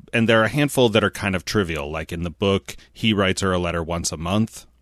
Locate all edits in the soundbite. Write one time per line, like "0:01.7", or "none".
none